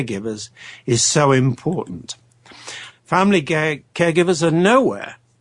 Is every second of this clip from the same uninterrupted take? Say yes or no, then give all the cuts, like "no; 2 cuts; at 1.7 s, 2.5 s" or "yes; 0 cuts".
no; 1 cut; at 2.9 s